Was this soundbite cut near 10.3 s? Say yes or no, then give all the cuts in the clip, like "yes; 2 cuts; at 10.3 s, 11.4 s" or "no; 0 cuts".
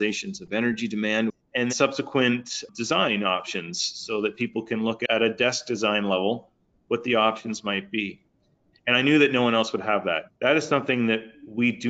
yes; 3 cuts; at 1.7 s, 8.7 s, 10.3 s